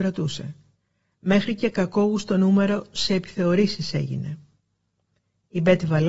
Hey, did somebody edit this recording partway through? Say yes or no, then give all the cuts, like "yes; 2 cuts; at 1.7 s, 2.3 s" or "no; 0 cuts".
no; 0 cuts